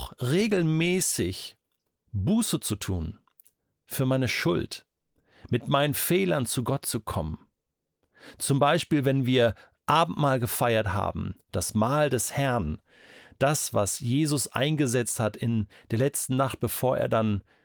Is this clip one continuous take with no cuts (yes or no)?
yes